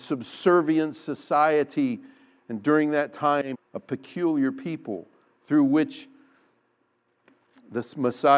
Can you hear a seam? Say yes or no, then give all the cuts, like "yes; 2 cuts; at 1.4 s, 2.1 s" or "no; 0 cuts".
yes; 1 cut; at 3.5 s